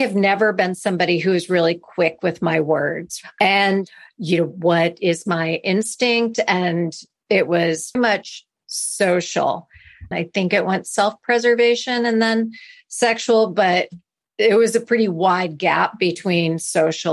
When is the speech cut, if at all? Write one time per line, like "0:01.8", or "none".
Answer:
0:03.4
0:08.0
0:10.1